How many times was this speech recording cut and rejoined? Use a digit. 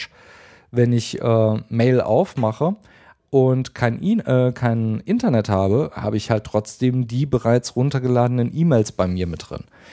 0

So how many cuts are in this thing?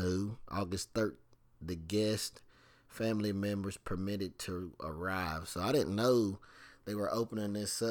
1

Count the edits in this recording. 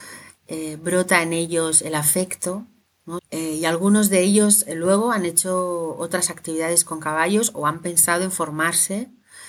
1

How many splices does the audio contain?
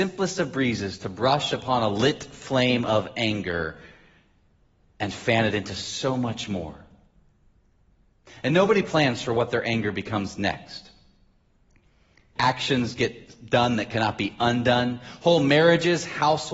1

